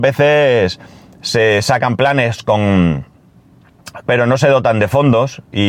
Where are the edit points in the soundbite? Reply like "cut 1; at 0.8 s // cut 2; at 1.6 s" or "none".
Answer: cut 1; at 4.0 s